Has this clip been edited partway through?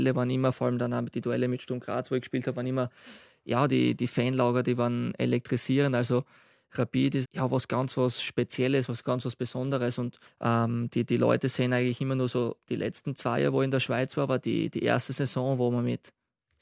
yes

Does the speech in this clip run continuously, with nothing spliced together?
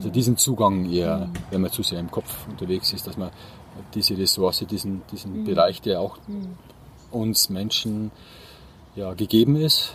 yes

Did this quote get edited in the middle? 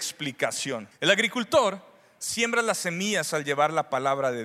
yes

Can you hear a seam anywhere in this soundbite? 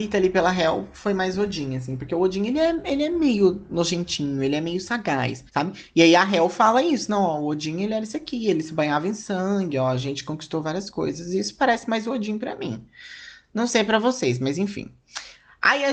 yes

